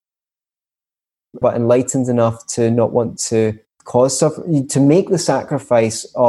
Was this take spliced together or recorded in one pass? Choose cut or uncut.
cut